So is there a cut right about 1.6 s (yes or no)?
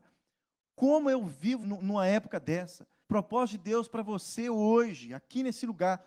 yes